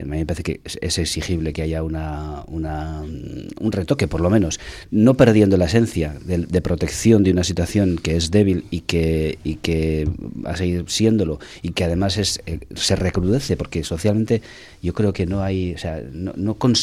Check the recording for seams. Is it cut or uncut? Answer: uncut